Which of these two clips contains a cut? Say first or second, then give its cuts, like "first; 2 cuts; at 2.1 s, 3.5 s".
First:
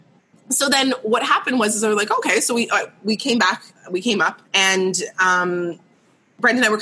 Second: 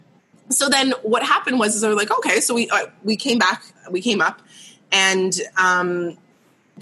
first; 1 cut; at 4.4 s